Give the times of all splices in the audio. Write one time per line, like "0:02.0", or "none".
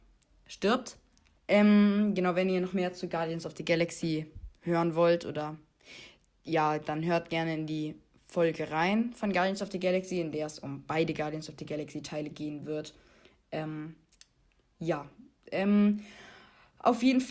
0:01.4